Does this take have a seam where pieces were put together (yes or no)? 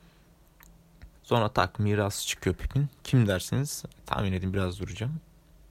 yes